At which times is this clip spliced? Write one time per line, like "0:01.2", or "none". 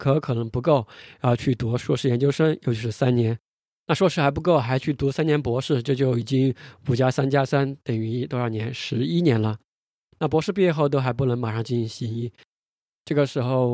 none